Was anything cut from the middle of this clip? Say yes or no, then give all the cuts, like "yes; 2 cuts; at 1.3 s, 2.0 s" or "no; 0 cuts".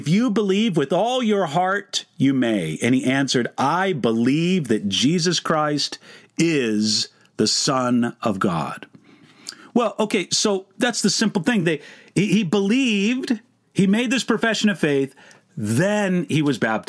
no; 0 cuts